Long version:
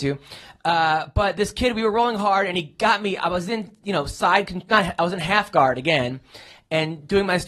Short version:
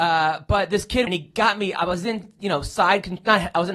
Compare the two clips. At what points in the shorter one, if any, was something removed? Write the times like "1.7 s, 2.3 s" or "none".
1.1 s